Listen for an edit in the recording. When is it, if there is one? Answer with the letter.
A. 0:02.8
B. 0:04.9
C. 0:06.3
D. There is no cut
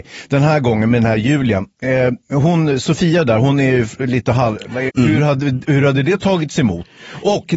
B